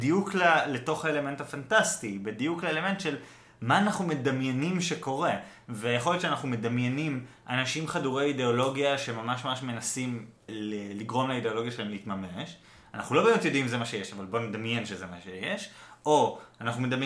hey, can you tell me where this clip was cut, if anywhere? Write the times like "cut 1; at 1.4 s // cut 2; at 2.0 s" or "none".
cut 1; at 10.5 s